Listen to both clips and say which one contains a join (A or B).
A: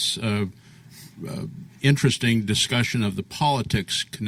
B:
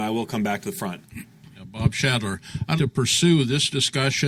B